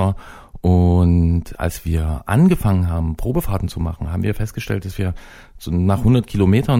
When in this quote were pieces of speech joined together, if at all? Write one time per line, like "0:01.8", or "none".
0:01.6